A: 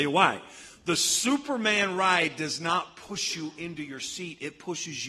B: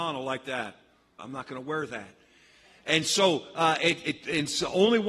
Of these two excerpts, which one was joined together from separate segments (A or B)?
B